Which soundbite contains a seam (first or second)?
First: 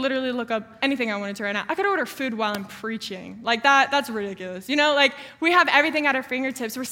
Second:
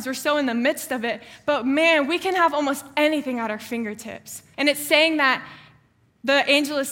second